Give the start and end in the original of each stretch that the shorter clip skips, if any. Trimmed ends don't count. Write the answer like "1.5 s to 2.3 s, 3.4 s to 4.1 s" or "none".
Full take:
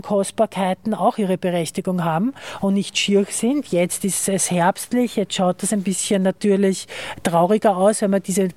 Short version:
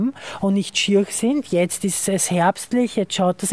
none